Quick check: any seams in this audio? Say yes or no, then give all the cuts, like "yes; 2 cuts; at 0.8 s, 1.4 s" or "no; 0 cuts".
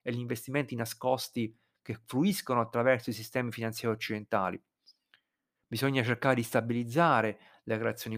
no; 0 cuts